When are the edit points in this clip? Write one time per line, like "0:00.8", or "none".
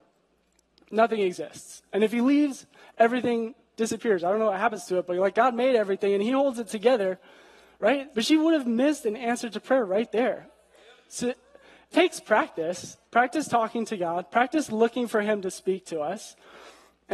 0:08.1
0:11.9
0:13.1